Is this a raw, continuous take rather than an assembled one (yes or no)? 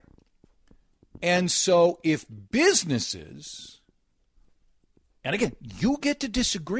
yes